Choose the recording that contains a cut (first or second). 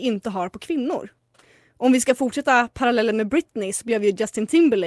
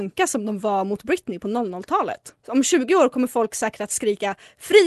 second